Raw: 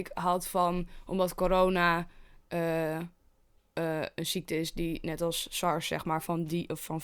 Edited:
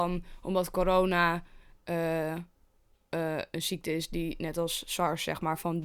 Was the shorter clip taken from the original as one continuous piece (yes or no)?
yes